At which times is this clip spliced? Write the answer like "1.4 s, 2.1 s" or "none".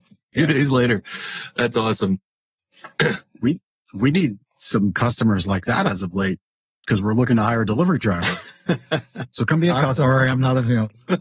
none